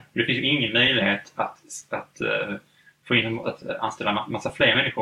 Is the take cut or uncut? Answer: cut